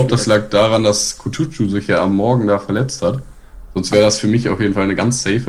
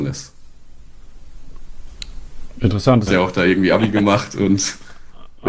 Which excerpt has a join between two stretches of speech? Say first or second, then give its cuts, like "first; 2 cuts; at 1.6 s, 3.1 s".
second; 1 cut; at 3.1 s